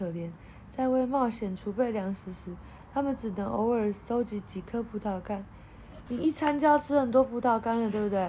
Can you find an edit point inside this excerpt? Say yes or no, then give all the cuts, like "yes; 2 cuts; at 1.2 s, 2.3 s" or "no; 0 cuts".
yes; 1 cut; at 6.1 s